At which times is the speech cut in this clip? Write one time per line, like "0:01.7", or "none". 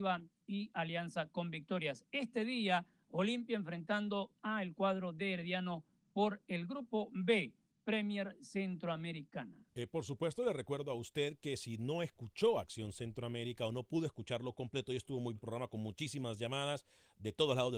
0:09.7
0:15.4